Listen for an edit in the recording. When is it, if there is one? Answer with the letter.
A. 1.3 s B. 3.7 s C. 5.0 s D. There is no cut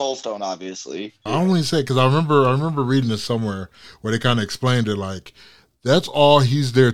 A